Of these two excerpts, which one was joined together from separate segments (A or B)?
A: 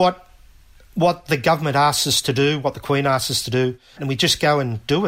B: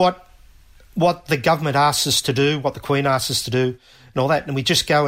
A